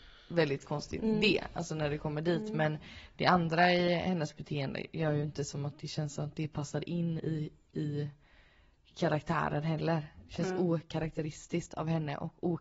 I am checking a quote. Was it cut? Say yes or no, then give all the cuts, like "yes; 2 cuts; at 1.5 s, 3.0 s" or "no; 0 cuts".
no; 0 cuts